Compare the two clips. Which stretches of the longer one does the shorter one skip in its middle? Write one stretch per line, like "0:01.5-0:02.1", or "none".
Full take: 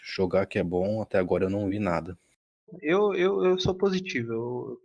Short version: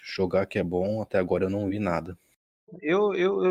none